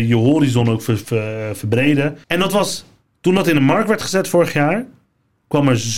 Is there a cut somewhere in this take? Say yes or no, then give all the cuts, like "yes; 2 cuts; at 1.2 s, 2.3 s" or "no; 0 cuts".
yes; 2 cuts; at 1.0 s, 2.2 s